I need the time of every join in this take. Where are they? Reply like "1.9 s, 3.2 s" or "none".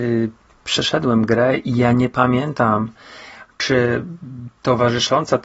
none